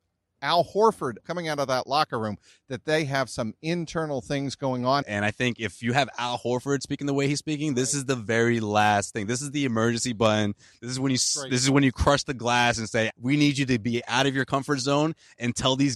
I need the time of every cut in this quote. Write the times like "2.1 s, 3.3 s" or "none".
1.2 s, 5.0 s, 13.1 s